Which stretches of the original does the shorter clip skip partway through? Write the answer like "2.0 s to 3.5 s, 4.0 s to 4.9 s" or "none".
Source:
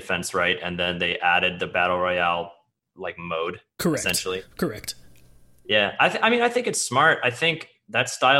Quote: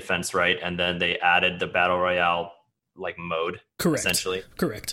none